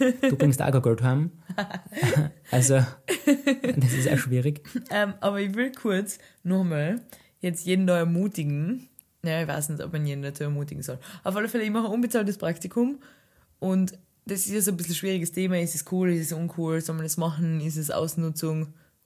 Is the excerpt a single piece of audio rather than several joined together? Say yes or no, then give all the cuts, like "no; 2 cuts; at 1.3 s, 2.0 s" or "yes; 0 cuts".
yes; 0 cuts